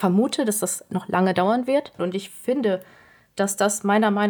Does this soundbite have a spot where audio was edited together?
yes; 1 cut; at 2.0 s

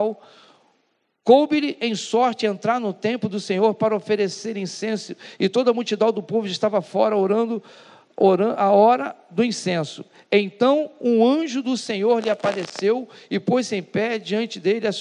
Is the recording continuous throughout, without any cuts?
yes; 0 cuts

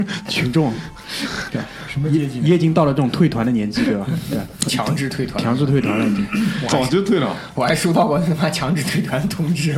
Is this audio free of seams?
yes; 0 cuts

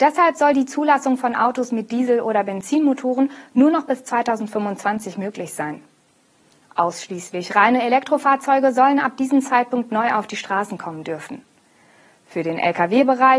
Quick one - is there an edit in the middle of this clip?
no; 0 cuts

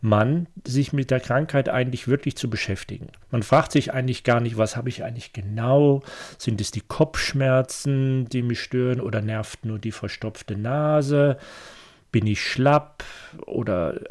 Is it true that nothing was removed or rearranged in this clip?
yes; 0 cuts

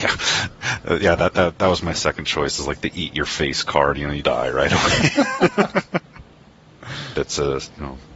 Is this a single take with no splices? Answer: no; 2 cuts; at 4.2 s, 7.1 s

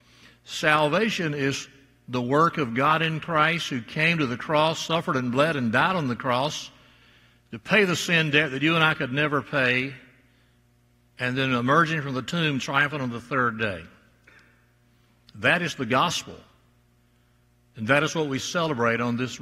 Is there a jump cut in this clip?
no; 0 cuts

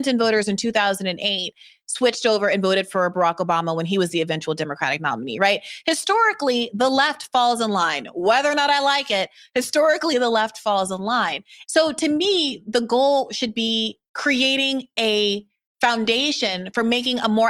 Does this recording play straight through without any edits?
no; 2 cuts; at 11.6 s, 14.1 s

